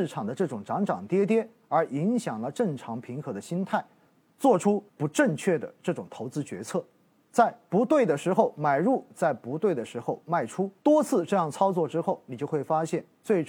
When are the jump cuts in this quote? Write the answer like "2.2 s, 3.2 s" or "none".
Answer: 4.9 s, 10.8 s